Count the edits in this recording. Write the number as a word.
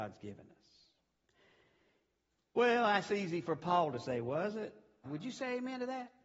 one